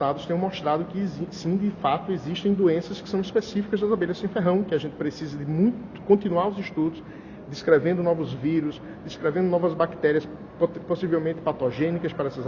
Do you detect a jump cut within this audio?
no; 0 cuts

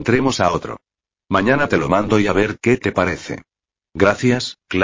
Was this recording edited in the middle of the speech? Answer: no; 0 cuts

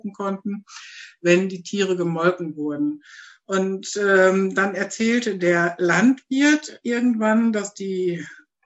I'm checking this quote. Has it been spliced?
no; 0 cuts

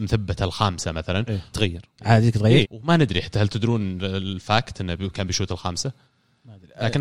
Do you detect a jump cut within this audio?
yes; 2 cuts; at 1.5 s, 2.6 s

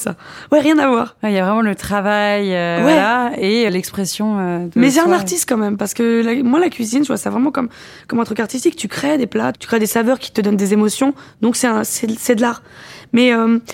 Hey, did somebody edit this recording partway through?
yes; 2 cuts; at 3.7 s, 9.5 s

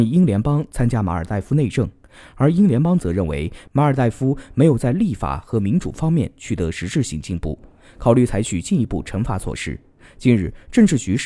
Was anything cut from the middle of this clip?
no; 0 cuts

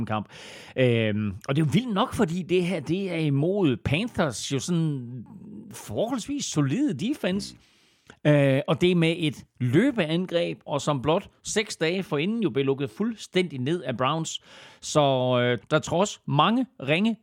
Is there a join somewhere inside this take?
yes; 2 cuts; at 10.7 s, 15.6 s

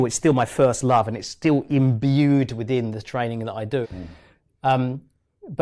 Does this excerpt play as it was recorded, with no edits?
no; 1 cut; at 3.8 s

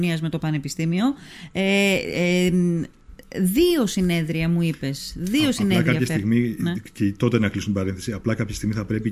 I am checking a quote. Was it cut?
no; 0 cuts

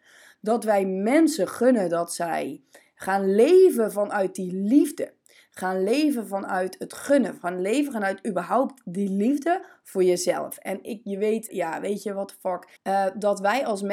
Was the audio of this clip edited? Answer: yes; 2 cuts; at 11.5 s, 12.8 s

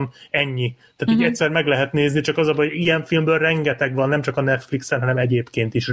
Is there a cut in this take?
no; 0 cuts

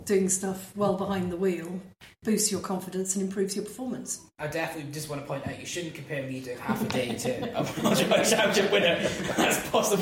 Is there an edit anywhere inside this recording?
no; 0 cuts

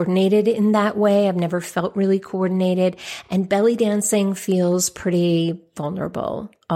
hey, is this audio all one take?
yes; 0 cuts

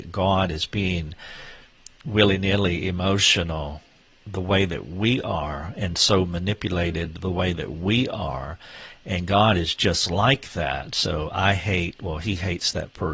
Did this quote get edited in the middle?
no; 0 cuts

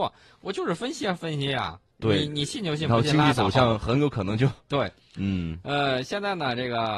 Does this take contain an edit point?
no; 0 cuts

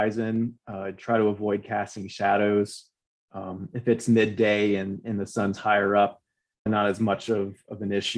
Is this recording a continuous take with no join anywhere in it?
no; 1 cut; at 6.7 s

